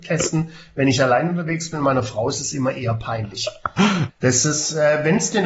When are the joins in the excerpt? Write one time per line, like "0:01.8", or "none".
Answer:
0:04.1